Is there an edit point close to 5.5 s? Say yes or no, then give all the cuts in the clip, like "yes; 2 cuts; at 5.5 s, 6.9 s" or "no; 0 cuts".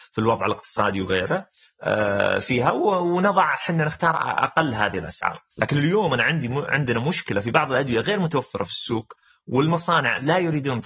yes; 1 cut; at 5.5 s